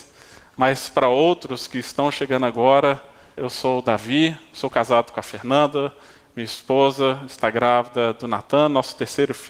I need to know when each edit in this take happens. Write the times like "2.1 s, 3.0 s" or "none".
3.4 s